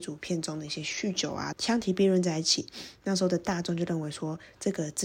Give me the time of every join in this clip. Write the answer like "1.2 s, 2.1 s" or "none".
1.5 s